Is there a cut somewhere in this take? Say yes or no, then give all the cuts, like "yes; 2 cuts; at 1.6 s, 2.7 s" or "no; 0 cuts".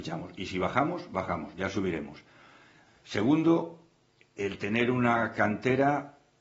no; 0 cuts